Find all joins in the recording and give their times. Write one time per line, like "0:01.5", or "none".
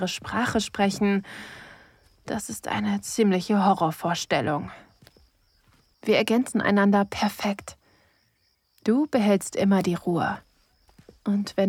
0:05.9